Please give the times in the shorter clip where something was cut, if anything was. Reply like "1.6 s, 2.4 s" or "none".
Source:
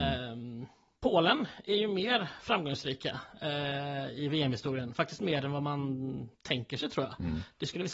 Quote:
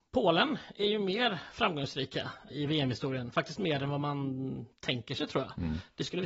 2.5 s

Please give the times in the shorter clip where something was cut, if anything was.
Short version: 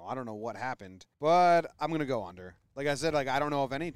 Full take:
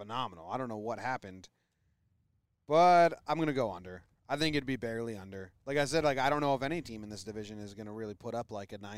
1.1 s, 2.7 s

